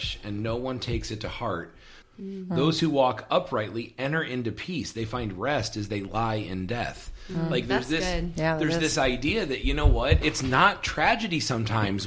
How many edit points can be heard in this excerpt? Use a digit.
1